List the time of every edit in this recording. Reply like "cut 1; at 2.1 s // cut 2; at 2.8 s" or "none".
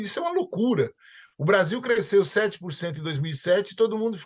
none